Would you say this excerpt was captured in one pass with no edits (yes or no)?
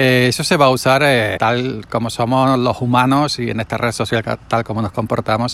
no